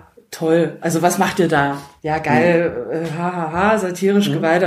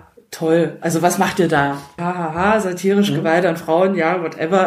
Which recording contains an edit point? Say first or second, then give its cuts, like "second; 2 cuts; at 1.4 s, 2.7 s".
second; 1 cut; at 2.0 s